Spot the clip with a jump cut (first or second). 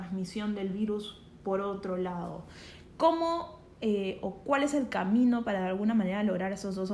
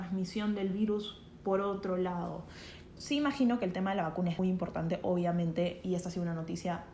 second